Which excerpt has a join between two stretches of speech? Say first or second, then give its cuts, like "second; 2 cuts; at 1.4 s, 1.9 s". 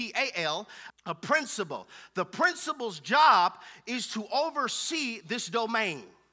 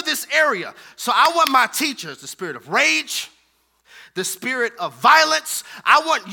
first; 1 cut; at 0.9 s